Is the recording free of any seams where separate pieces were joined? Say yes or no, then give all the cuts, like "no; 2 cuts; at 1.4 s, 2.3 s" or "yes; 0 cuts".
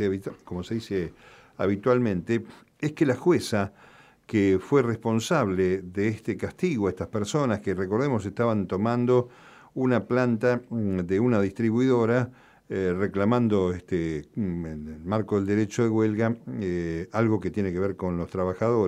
yes; 0 cuts